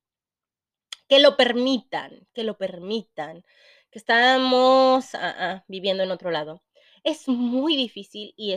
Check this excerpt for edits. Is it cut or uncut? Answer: uncut